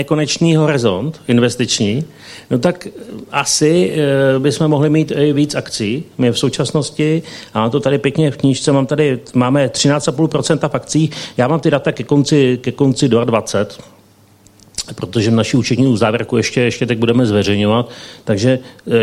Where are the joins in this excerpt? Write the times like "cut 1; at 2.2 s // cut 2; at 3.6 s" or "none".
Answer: none